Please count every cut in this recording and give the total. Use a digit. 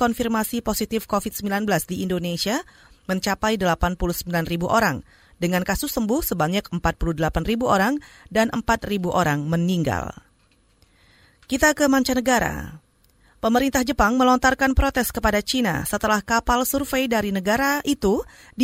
0